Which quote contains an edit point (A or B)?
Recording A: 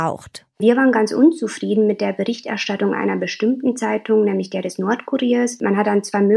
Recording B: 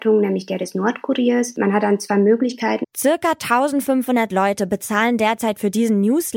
B